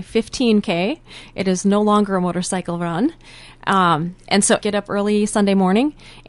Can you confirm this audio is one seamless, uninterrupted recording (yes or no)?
no